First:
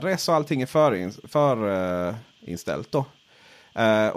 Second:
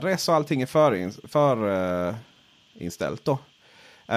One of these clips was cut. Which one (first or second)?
first